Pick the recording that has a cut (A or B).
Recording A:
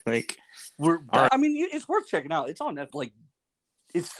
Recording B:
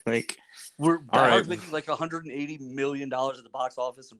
A